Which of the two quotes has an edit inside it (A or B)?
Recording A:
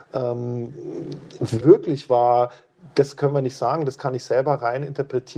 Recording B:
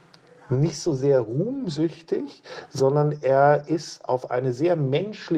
A